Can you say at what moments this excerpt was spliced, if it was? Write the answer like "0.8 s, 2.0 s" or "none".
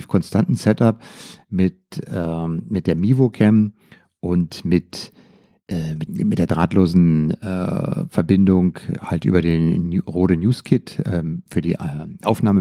6.1 s